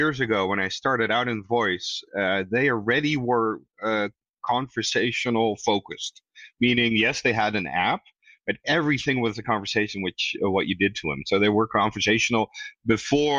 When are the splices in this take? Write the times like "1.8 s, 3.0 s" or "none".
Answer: none